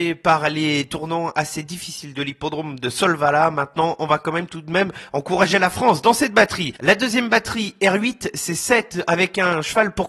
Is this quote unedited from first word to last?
yes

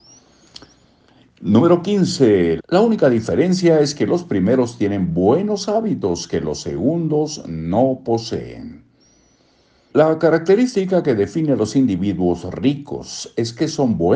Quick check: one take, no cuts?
no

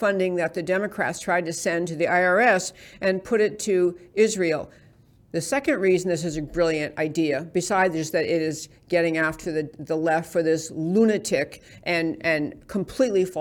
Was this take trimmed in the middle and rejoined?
no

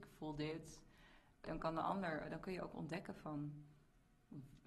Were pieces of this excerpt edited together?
yes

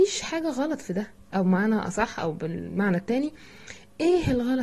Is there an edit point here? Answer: no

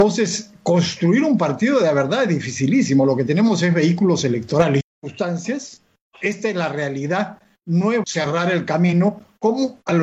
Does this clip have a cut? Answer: yes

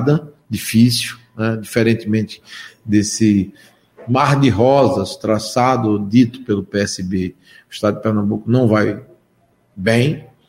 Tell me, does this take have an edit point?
no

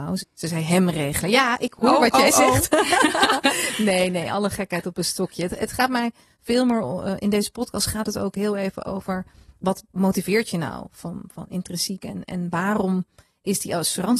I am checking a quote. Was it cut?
no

